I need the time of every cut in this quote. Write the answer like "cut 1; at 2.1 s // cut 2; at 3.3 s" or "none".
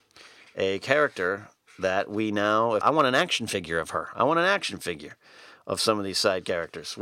cut 1; at 2.8 s

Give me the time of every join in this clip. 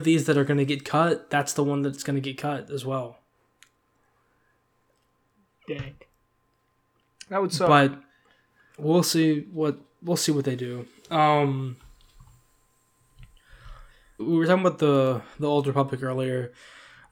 cut 1; at 14.2 s

